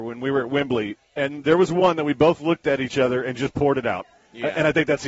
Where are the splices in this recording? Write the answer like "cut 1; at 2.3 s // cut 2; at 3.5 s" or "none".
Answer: cut 1; at 1.0 s